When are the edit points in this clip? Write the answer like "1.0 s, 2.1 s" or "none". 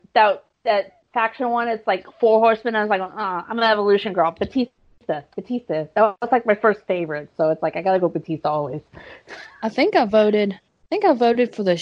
none